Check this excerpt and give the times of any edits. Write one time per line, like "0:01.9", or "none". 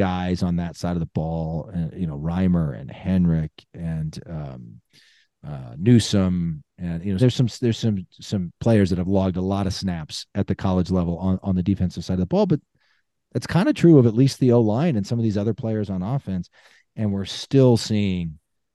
0:07.2